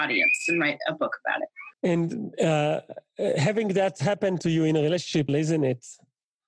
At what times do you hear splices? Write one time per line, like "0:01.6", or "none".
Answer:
0:01.7
0:05.3